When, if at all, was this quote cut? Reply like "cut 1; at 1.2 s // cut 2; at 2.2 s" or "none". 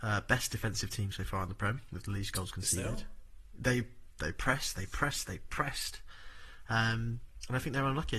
none